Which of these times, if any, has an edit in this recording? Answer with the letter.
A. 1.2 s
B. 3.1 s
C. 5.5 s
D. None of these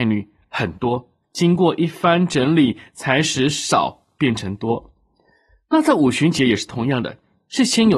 A